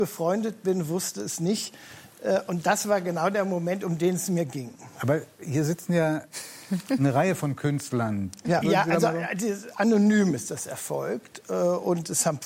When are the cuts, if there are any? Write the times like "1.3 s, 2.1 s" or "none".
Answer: 8.6 s